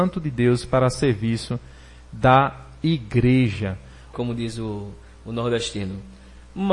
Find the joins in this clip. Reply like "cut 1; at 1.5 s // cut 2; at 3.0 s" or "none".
cut 1; at 4.1 s